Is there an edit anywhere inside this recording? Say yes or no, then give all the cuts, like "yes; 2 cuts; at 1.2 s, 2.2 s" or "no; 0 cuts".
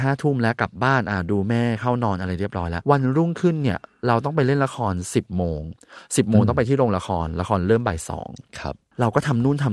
yes; 1 cut; at 2.8 s